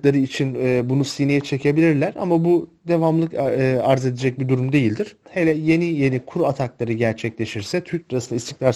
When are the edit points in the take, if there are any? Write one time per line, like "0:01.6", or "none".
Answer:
0:05.3